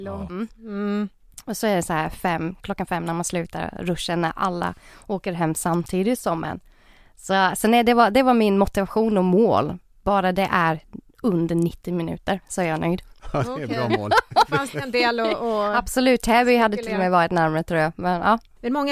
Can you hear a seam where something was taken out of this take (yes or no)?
no